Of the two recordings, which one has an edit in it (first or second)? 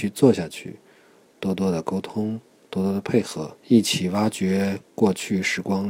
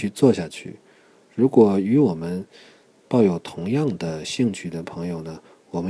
first